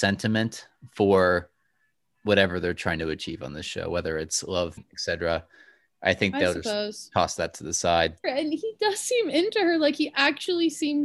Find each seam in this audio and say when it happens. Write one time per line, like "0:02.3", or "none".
0:04.8
0:08.2